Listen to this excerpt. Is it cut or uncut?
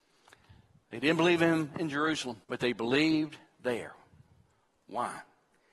cut